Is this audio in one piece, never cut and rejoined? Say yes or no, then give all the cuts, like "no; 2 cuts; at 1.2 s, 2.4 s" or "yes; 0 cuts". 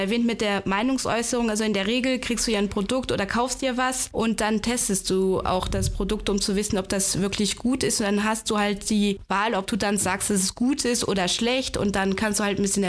yes; 0 cuts